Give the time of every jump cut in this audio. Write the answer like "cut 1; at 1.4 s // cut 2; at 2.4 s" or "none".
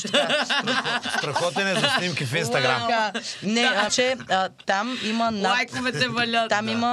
cut 1; at 3.9 s